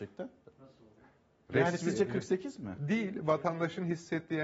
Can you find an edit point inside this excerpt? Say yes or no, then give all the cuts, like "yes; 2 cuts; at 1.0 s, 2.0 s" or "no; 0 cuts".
no; 0 cuts